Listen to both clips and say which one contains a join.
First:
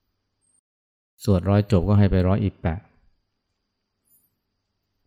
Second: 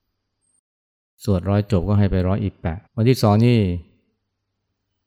second; 1 cut; at 2.9 s

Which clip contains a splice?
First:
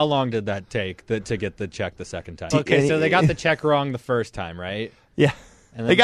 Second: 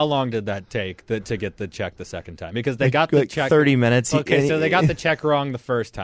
first; 1 cut; at 2.5 s

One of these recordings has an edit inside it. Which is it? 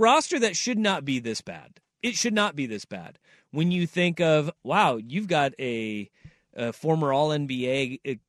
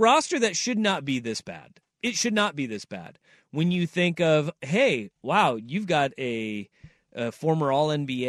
first; 1 cut; at 4.6 s

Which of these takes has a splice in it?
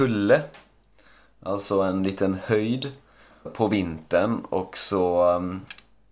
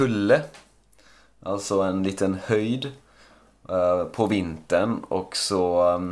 first; 1 cut; at 3.5 s

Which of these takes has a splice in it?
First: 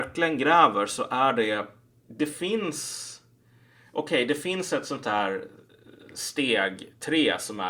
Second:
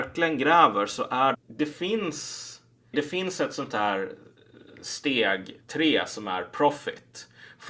second; 2 cuts; at 1.3 s, 2.9 s

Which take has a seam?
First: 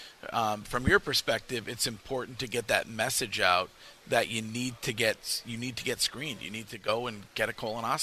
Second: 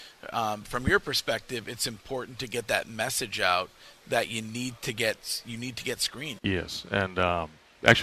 second; 1 cut; at 6.4 s

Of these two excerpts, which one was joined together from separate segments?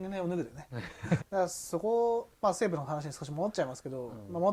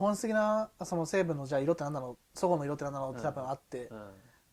first; 1 cut; at 1.2 s

